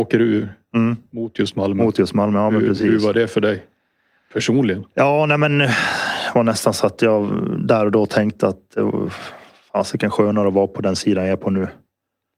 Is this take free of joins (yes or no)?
yes